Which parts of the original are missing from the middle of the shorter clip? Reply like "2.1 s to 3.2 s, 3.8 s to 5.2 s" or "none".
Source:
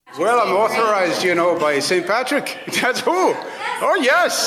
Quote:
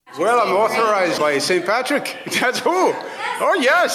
1.2 s to 1.6 s